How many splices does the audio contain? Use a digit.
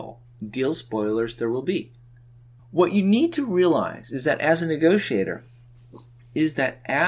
1